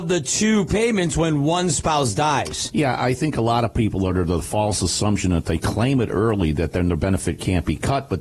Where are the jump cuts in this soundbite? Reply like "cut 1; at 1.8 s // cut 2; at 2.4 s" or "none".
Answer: none